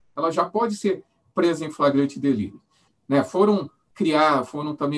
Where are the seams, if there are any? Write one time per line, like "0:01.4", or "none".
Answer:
0:02.9